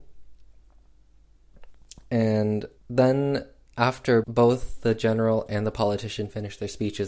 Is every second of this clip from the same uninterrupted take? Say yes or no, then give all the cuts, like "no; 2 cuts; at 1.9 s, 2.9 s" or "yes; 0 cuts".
no; 2 cuts; at 2.8 s, 4.2 s